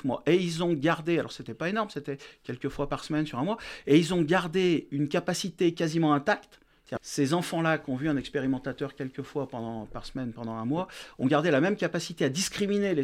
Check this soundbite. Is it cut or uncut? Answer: cut